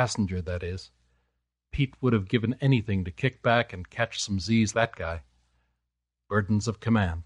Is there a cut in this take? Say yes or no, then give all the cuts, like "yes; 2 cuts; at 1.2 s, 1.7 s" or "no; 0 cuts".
yes; 2 cuts; at 1.7 s, 4.7 s